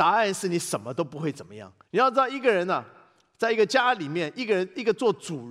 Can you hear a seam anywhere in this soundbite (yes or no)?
yes